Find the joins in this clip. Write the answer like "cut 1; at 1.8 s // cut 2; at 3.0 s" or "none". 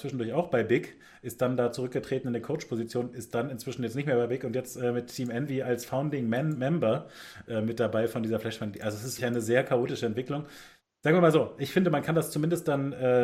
cut 1; at 9.2 s